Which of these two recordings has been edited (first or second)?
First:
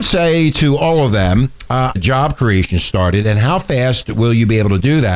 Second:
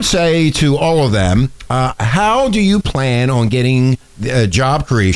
first